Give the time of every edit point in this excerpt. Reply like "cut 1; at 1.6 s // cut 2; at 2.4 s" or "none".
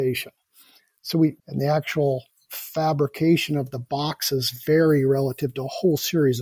cut 1; at 1.4 s